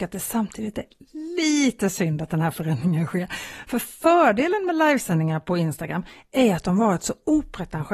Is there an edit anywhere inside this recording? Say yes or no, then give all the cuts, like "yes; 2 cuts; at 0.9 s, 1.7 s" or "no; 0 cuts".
no; 0 cuts